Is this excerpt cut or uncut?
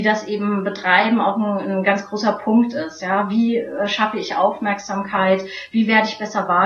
uncut